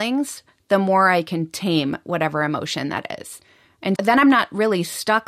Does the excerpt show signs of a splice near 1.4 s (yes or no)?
no